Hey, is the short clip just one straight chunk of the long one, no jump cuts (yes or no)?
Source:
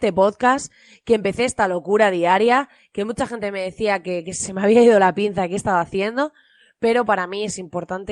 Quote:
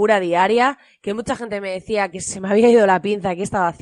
no